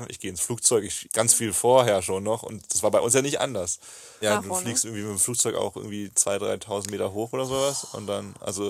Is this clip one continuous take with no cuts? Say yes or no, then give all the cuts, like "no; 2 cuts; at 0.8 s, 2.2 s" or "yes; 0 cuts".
no; 2 cuts; at 1.0 s, 4.2 s